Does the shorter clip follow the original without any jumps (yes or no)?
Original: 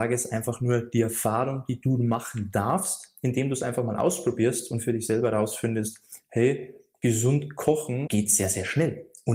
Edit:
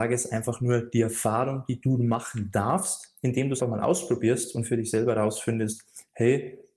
no